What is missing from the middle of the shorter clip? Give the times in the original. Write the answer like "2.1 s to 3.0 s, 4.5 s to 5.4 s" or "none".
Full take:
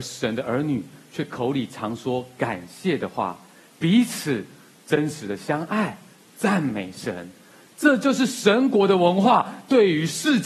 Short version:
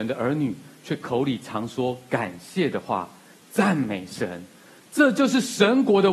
3.6 s to 6.2 s